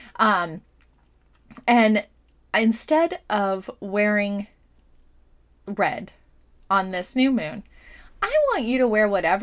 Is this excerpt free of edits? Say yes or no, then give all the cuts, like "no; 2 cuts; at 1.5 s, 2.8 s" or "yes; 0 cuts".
yes; 0 cuts